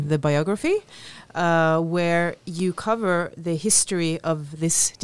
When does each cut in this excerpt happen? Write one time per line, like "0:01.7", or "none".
none